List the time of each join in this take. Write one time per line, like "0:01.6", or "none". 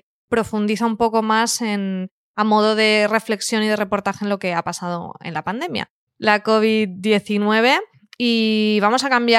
0:06.1